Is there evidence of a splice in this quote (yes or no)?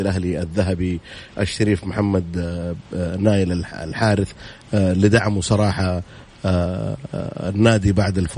no